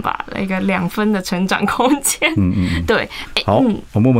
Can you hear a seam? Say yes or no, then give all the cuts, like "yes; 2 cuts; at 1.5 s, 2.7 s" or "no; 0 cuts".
no; 0 cuts